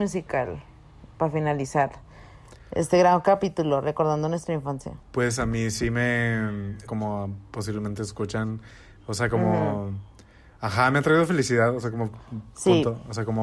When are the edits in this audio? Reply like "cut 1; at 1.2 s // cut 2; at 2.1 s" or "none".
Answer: cut 1; at 5.0 s // cut 2; at 6.9 s